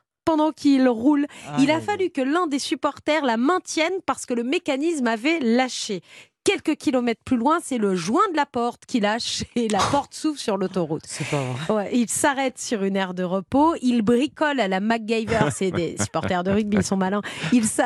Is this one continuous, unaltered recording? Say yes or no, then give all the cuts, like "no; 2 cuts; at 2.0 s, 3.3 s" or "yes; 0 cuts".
yes; 0 cuts